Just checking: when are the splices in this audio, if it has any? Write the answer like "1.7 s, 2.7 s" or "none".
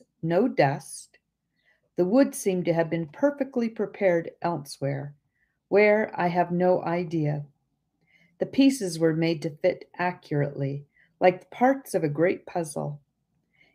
none